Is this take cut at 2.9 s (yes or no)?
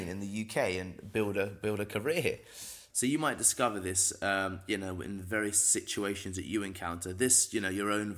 yes